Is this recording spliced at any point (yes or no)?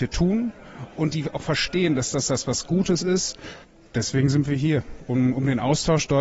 no